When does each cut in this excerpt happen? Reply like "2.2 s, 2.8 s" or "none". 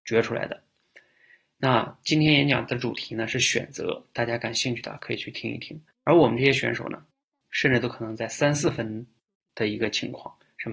5.9 s, 7.5 s